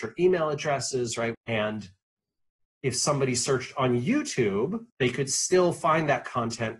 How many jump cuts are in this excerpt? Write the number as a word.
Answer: two